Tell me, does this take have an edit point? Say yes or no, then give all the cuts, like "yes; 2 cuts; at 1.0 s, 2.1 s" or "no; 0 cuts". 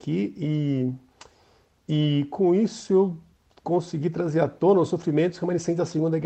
no; 0 cuts